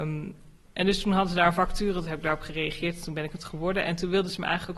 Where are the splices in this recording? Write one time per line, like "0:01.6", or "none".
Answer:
none